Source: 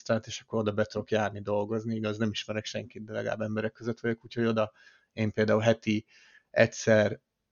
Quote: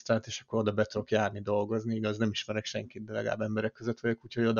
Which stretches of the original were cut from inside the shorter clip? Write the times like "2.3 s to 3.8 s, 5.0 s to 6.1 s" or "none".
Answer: none